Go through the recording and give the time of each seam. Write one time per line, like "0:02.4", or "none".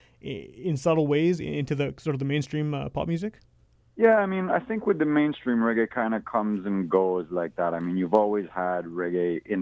none